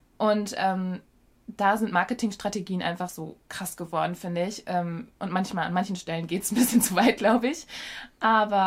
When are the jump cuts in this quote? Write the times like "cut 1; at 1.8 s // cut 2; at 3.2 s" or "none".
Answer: none